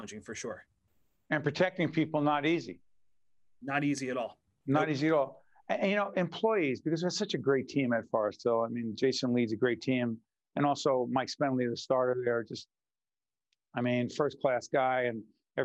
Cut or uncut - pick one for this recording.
uncut